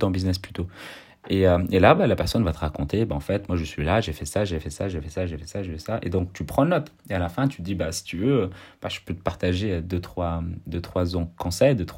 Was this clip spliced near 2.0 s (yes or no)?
no